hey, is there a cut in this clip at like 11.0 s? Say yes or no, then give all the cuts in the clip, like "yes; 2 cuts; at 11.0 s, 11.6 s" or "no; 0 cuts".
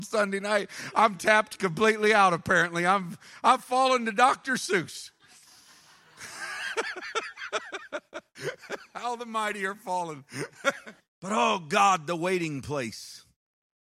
yes; 1 cut; at 11.0 s